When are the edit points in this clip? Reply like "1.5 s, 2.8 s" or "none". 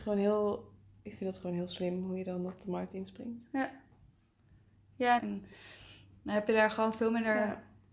5.2 s